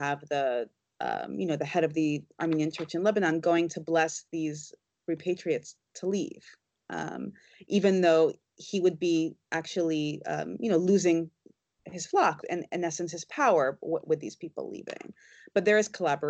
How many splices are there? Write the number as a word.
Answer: one